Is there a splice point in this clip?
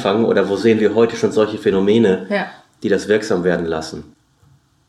no; 0 cuts

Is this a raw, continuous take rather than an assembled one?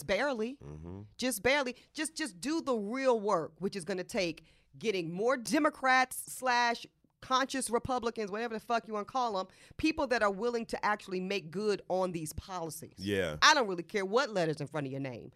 yes; 0 cuts

